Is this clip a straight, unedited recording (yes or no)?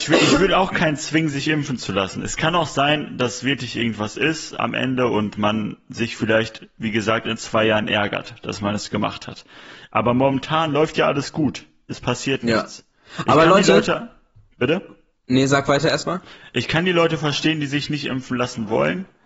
yes